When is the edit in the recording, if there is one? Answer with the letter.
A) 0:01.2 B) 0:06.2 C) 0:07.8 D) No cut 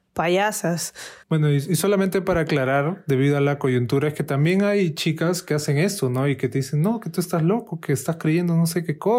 A